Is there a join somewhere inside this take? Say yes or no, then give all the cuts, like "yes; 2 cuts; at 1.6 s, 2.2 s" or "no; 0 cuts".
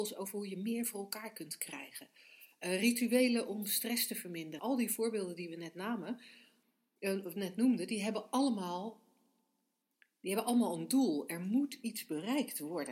yes; 1 cut; at 4.6 s